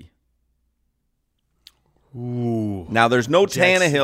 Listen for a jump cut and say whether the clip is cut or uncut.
uncut